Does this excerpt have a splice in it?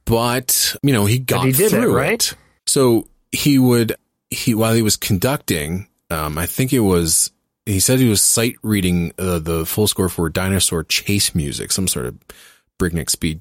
yes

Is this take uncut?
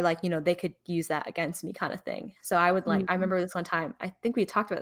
yes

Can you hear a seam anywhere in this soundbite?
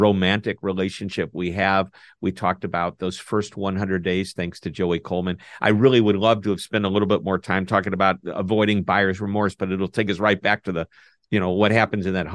no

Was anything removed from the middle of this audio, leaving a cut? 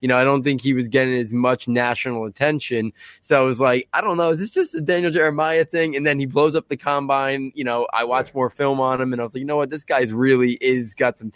no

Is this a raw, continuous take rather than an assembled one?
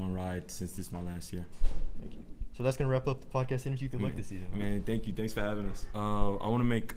no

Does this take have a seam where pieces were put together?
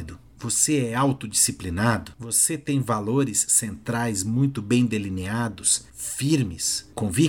no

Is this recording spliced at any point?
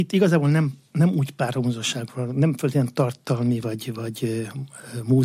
no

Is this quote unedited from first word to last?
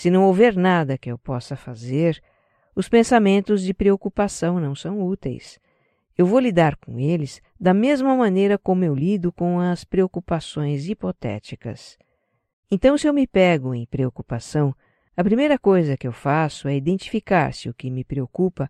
no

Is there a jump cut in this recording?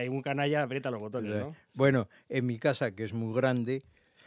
no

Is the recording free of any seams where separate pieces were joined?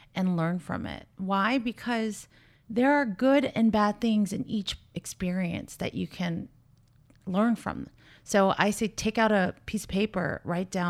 yes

